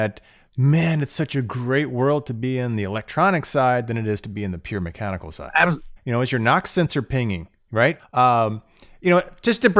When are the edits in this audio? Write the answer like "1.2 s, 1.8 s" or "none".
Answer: 6.0 s, 8.0 s